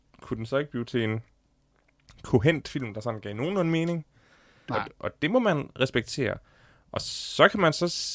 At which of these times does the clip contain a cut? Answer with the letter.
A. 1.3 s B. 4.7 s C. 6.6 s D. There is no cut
B